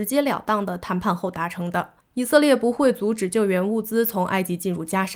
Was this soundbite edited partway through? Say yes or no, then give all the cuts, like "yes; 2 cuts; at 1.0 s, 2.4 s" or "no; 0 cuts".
yes; 1 cut; at 2.0 s